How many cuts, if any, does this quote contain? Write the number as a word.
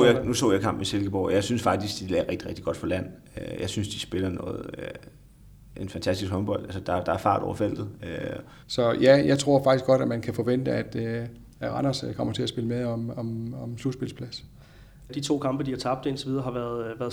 two